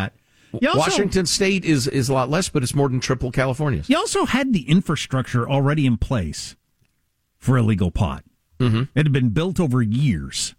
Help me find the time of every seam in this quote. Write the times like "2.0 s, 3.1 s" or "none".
none